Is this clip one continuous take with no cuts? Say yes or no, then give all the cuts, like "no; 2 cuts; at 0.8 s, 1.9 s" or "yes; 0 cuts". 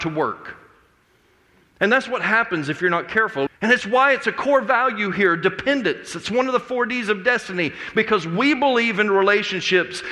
no; 1 cut; at 3.5 s